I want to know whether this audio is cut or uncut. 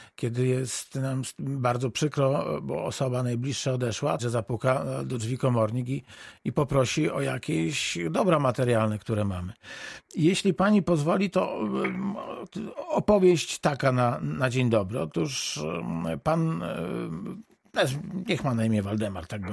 cut